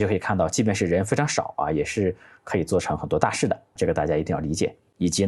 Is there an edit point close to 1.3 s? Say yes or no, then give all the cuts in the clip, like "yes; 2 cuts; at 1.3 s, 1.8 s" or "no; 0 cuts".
no; 1 cut; at 3.8 s